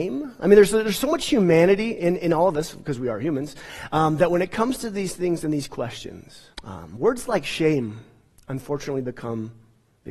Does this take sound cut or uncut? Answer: cut